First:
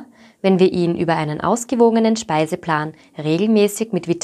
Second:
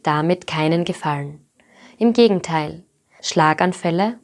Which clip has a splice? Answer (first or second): second